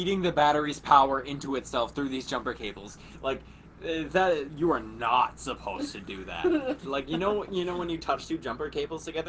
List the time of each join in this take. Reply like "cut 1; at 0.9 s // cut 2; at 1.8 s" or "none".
cut 1; at 6.8 s